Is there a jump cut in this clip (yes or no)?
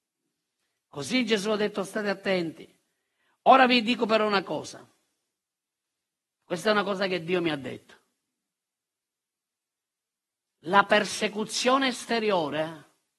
no